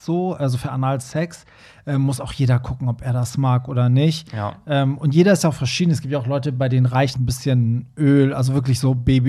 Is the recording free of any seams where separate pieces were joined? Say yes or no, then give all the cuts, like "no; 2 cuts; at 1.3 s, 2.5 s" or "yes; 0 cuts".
no; 1 cut; at 7.1 s